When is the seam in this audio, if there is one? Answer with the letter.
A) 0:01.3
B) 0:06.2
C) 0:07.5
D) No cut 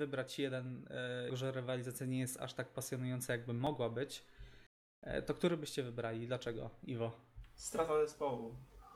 A